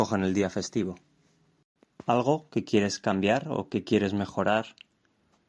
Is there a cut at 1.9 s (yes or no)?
yes